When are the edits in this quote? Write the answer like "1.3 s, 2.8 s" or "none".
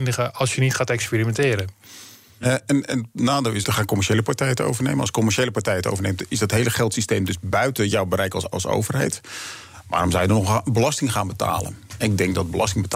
3.6 s